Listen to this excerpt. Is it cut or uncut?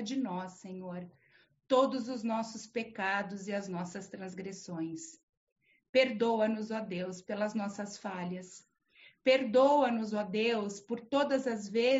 uncut